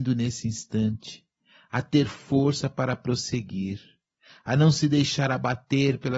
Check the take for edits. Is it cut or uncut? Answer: uncut